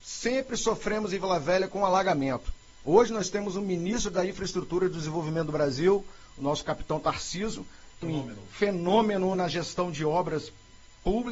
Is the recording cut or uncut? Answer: cut